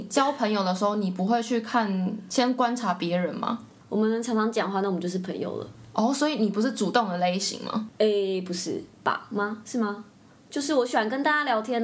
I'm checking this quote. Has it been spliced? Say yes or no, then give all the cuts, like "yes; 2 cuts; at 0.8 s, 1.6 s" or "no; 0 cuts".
yes; 1 cut; at 3.8 s